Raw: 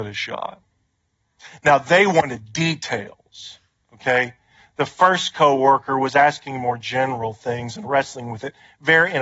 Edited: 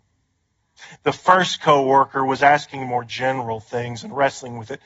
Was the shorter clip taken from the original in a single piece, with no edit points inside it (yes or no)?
no